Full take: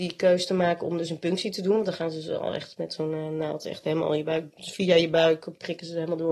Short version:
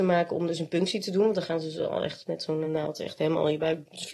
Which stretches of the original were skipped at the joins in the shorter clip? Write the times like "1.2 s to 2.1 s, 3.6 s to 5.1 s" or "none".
3.1 s to 3.3 s